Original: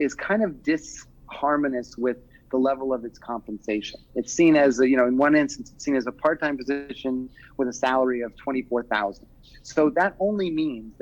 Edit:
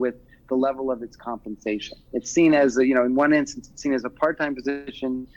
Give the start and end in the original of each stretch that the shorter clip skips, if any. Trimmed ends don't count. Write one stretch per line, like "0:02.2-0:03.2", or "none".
none